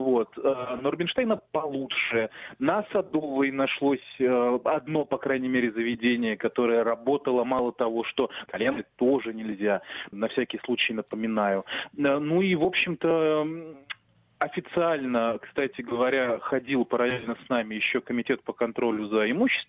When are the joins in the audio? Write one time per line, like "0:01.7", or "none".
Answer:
0:08.5
0:10.1